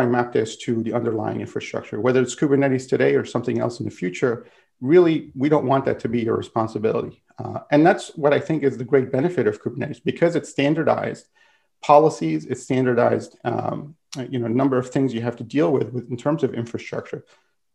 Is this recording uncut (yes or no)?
yes